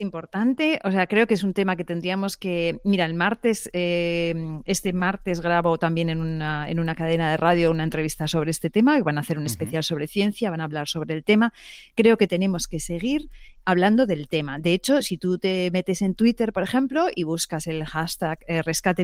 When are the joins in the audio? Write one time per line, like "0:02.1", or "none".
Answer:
none